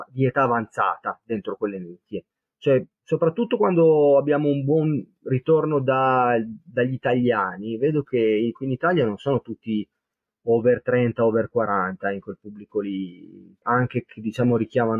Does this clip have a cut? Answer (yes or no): yes